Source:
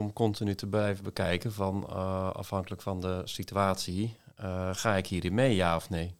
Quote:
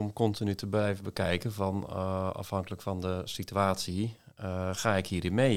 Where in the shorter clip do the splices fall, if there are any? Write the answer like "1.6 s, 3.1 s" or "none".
none